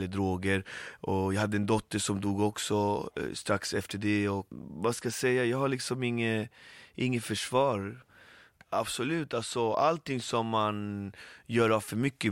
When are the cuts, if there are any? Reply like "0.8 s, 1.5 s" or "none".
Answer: 8.5 s